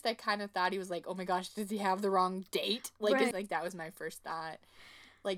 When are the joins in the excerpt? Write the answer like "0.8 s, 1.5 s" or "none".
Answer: 3.3 s